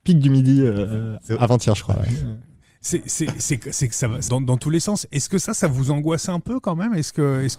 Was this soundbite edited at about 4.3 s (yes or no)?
yes